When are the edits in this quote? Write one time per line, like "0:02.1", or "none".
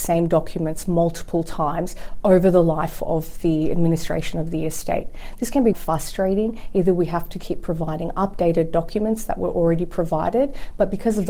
0:05.7

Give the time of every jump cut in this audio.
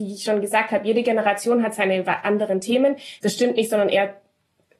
0:03.2

